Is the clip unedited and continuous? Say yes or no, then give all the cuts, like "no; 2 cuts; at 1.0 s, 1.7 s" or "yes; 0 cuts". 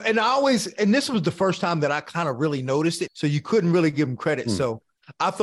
no; 1 cut; at 3.1 s